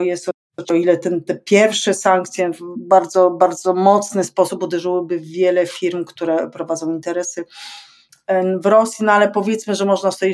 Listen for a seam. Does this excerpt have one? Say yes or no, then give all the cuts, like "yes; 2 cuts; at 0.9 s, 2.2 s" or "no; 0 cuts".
no; 0 cuts